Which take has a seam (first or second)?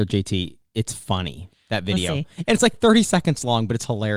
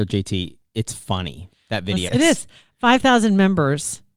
second